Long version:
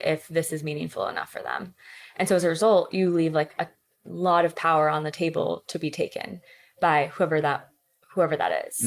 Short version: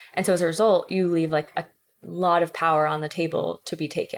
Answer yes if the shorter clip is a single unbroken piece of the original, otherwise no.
yes